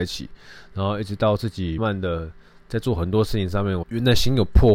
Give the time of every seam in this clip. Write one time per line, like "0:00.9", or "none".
0:01.8
0:03.8